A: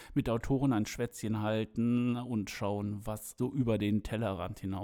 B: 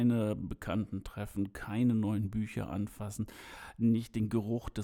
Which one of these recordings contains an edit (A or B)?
A